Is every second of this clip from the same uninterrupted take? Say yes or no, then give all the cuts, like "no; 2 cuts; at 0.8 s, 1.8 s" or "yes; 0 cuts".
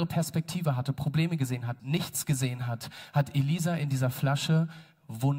no; 1 cut; at 1.8 s